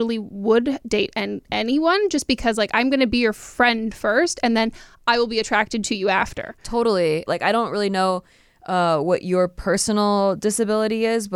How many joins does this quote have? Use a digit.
1